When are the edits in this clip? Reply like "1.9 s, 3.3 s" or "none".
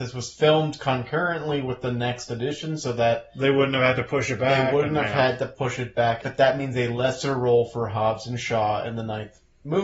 6.2 s